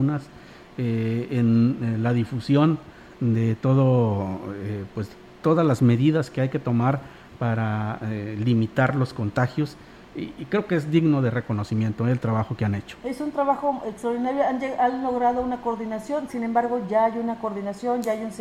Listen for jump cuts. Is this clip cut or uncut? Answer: cut